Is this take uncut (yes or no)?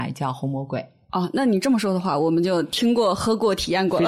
yes